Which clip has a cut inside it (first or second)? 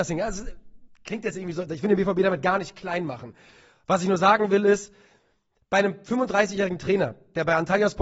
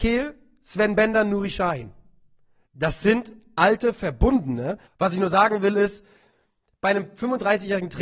second